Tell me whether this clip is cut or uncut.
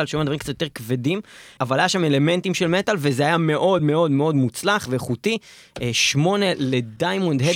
uncut